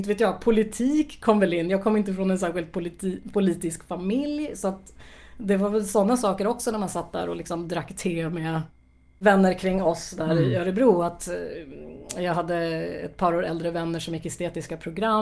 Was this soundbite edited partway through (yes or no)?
no